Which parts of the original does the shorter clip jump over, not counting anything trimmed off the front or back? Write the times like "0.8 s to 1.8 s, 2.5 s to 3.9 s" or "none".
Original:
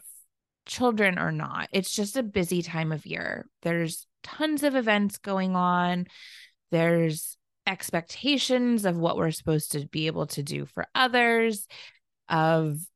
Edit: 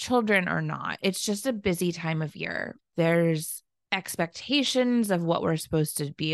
3.5 s to 6.5 s